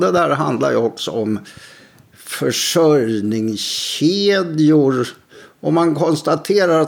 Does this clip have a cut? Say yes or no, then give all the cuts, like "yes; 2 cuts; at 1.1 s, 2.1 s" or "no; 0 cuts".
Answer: no; 0 cuts